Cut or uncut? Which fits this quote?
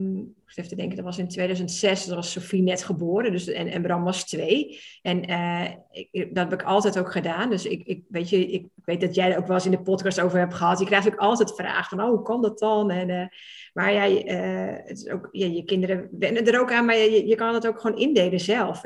uncut